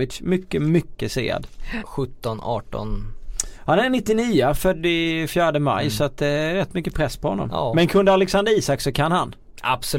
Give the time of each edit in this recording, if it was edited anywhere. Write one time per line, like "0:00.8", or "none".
0:01.8